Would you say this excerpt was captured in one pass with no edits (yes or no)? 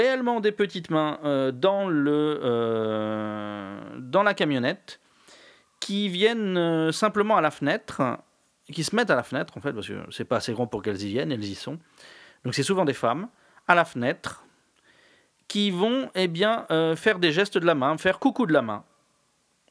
yes